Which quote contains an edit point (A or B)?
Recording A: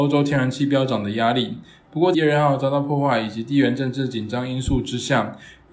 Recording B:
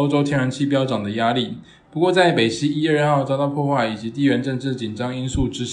A